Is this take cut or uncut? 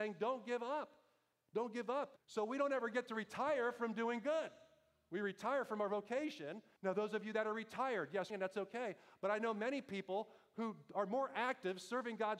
cut